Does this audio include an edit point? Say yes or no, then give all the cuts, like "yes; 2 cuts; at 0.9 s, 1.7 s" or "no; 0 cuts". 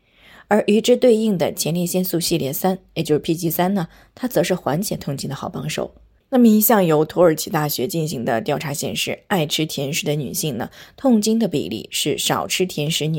yes; 1 cut; at 6.2 s